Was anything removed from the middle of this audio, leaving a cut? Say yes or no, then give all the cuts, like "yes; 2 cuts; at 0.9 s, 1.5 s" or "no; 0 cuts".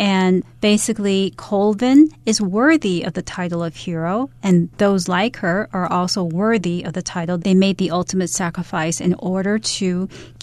yes; 1 cut; at 7.4 s